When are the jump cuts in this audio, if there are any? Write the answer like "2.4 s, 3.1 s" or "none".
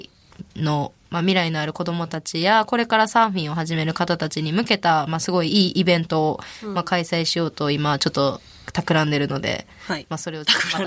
none